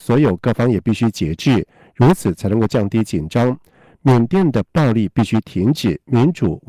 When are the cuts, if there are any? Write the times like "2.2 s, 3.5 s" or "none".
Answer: none